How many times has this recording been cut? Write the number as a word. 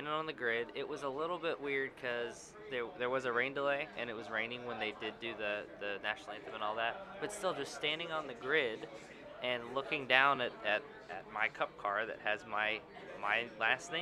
zero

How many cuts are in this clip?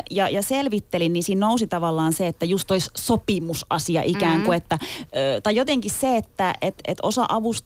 zero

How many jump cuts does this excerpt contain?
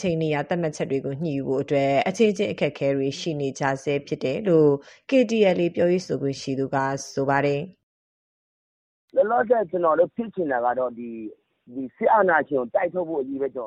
zero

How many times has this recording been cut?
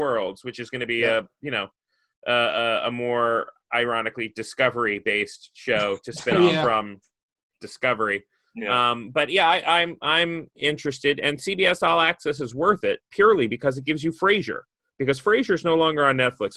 one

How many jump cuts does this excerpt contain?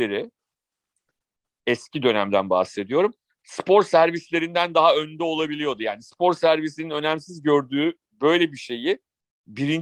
zero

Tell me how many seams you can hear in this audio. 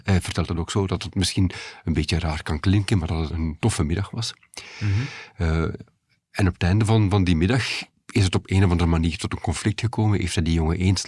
one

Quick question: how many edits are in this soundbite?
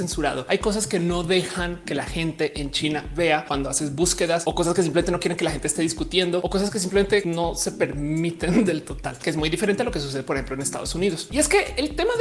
one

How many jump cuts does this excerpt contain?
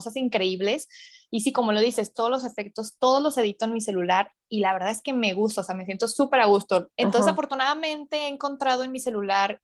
two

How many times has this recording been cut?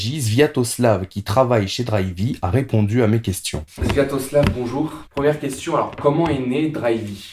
one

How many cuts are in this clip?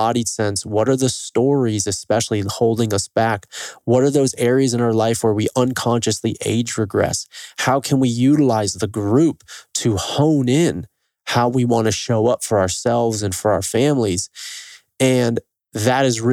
zero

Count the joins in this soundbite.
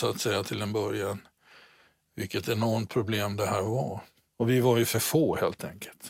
one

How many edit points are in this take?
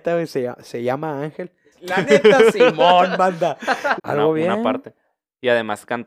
two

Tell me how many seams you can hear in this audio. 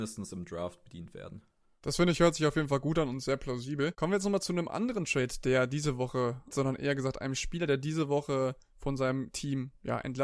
one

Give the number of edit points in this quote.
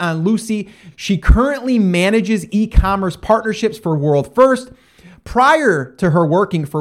one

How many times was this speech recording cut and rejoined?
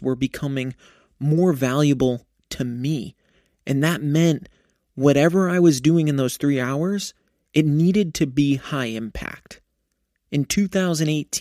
zero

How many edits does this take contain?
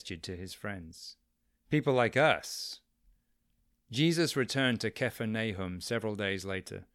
one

